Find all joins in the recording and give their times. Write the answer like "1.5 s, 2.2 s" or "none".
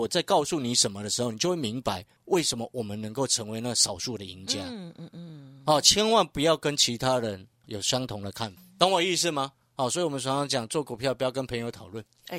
none